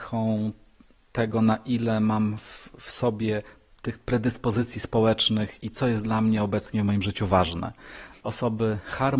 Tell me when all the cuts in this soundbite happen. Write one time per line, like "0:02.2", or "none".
0:08.1